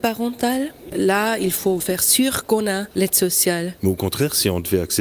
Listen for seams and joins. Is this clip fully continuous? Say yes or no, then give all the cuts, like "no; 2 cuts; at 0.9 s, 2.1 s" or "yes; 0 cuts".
no; 2 cuts; at 1.8 s, 3.8 s